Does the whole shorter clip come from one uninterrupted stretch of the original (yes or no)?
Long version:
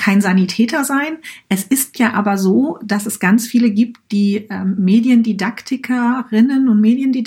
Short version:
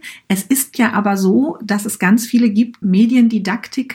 no